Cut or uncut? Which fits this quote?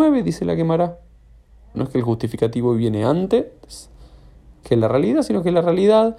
cut